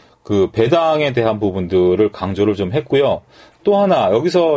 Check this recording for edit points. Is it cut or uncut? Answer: uncut